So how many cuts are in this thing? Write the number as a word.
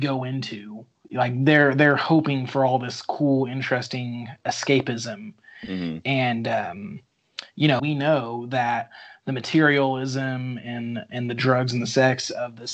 two